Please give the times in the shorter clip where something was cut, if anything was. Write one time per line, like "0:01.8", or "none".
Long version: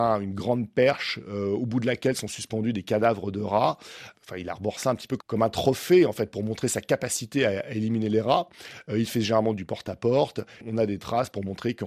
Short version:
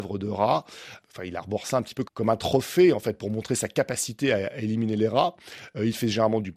none